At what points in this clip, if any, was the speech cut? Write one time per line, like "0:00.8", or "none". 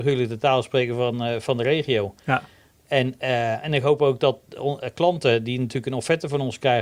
none